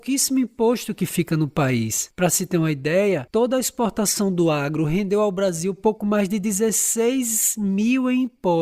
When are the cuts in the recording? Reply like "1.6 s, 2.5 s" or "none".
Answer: 3.3 s